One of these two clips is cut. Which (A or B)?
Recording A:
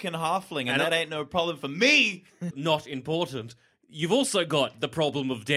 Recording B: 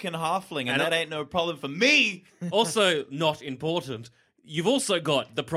A